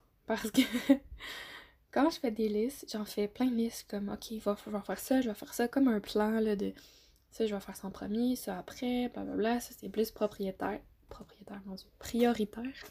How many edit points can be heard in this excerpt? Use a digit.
0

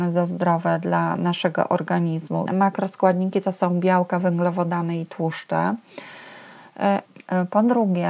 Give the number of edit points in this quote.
2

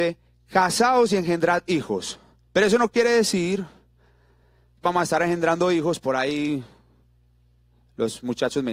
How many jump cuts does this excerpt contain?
1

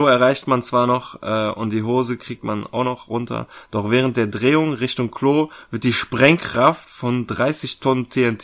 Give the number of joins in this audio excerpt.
0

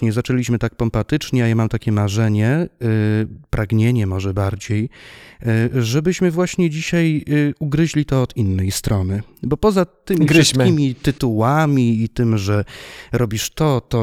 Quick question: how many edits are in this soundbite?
0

